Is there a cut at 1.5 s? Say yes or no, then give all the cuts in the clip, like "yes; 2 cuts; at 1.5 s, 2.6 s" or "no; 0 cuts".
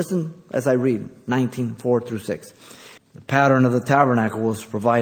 no; 1 cut; at 3.0 s